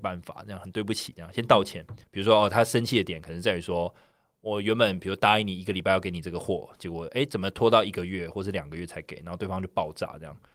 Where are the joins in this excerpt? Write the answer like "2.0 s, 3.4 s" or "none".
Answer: 2.0 s